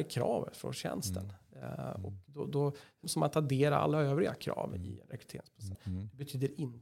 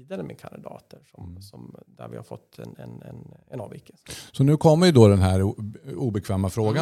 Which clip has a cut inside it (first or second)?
first